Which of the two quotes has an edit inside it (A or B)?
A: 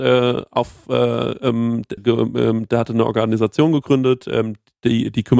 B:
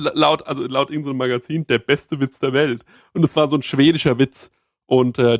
A